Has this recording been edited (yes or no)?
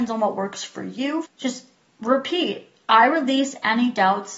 yes